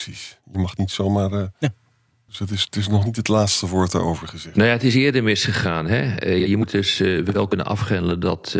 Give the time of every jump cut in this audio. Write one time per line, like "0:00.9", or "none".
none